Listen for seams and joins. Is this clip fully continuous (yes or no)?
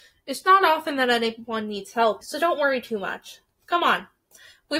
no